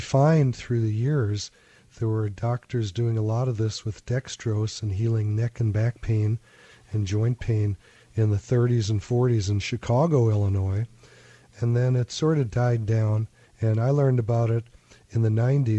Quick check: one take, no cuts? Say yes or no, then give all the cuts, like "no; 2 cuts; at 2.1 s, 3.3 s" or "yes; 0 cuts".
no; 1 cut; at 13.4 s